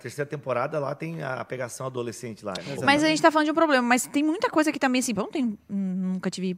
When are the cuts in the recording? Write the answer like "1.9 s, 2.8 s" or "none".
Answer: 2.6 s, 5.2 s